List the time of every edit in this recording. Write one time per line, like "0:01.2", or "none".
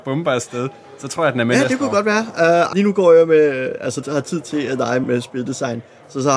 0:02.7
0:04.0
0:05.0